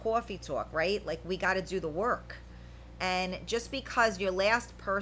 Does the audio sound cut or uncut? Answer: uncut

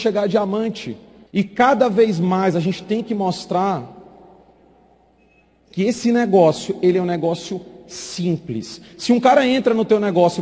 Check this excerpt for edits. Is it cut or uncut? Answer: cut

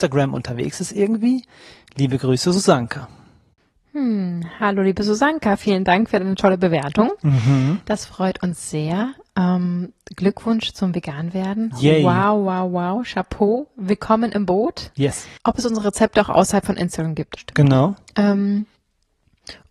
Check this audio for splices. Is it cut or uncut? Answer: cut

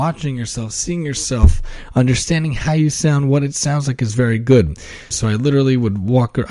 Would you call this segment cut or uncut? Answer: cut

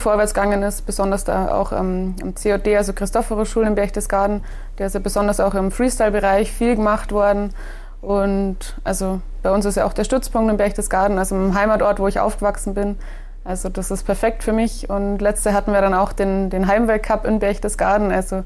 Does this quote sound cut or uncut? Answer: uncut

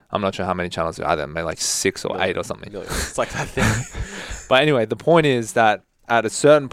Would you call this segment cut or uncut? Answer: uncut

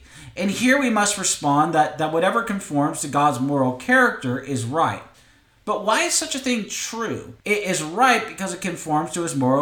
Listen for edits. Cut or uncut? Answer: cut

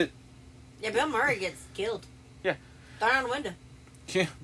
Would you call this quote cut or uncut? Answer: uncut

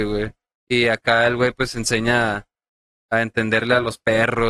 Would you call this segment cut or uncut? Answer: uncut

